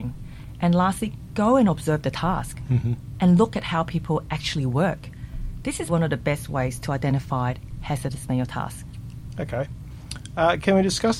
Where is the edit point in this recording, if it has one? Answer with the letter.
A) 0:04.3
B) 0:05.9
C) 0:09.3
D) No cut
B